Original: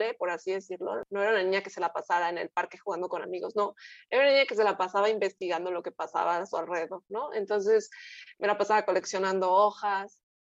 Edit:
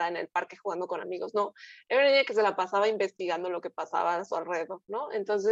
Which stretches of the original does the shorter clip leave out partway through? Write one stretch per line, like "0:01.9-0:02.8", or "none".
none